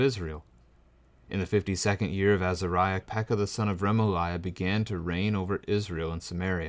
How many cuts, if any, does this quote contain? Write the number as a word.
one